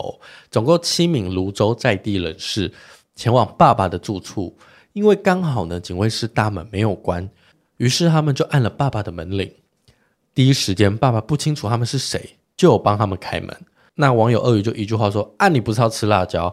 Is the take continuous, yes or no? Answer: yes